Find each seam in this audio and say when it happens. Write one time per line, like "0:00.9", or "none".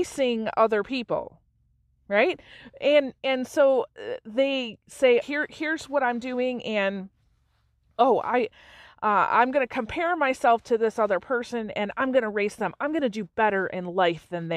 0:05.2